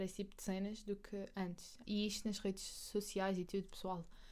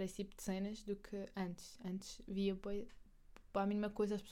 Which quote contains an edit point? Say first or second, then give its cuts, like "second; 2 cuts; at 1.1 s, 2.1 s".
first; 1 cut; at 1.8 s